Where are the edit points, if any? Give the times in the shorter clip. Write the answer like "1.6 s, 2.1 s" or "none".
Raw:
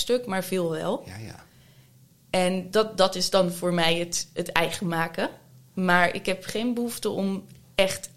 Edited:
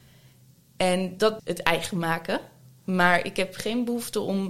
1.4 s